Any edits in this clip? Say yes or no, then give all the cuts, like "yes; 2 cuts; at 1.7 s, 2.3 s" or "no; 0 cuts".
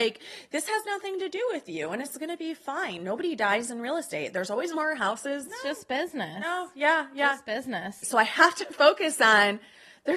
yes; 2 cuts; at 5.5 s, 8.0 s